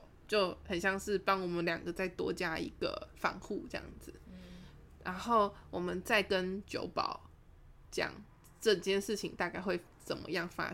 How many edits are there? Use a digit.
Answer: 0